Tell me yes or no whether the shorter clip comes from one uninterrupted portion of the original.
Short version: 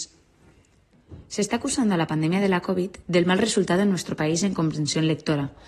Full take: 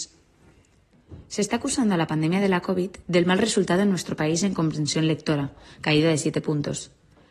yes